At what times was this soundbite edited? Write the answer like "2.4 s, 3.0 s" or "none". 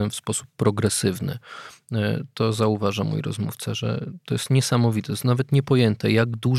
none